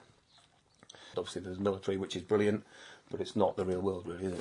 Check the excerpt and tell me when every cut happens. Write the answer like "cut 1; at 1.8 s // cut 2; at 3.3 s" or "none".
cut 1; at 1.1 s